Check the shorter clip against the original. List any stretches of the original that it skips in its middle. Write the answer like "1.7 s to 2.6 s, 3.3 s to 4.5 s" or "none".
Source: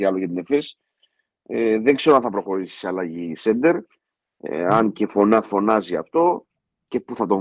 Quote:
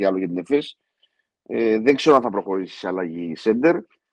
none